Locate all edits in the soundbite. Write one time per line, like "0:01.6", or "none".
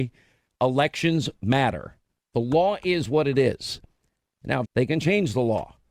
0:02.2
0:04.6

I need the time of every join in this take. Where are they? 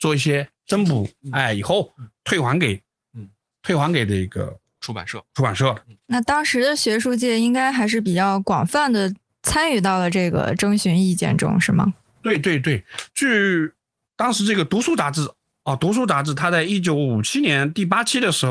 none

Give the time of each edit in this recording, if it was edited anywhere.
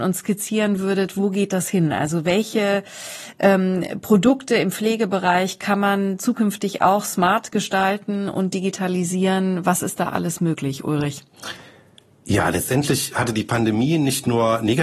none

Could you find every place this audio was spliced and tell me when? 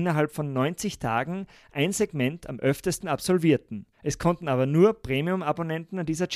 0:03.9

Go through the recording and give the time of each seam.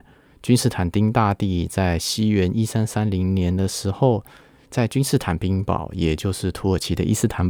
none

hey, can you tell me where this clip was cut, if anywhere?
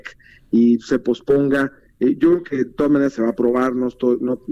none

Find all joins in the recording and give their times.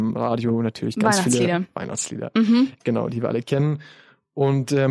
none

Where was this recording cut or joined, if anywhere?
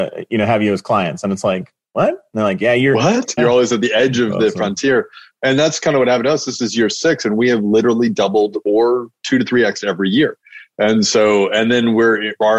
0:03.4

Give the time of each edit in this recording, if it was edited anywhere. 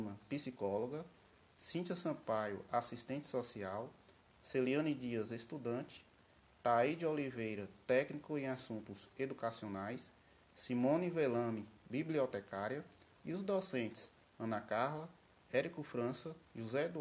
none

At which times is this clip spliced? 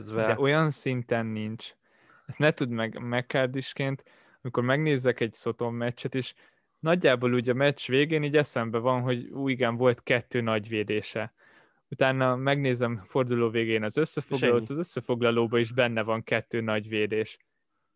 none

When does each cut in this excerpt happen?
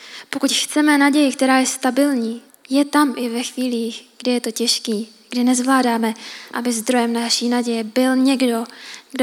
0:02.5
0:06.5

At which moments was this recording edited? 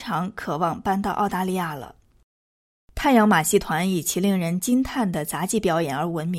none

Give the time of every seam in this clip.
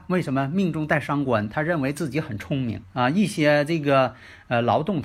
0:02.8

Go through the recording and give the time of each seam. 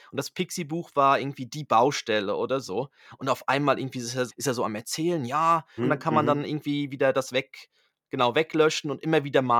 0:04.3
0:05.8

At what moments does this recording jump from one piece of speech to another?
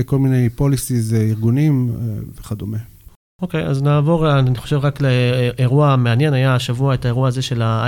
none

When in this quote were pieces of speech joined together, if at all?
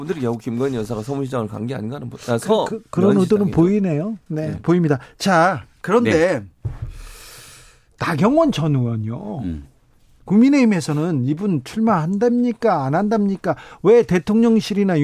none

